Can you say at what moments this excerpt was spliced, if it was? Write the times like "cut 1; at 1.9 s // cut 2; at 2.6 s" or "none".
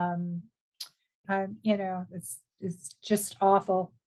cut 1; at 1.2 s